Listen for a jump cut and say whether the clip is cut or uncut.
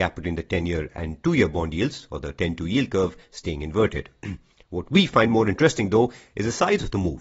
uncut